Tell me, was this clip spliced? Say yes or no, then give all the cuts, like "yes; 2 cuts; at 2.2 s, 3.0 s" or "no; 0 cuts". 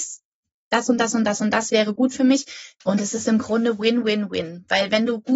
yes; 1 cut; at 2.8 s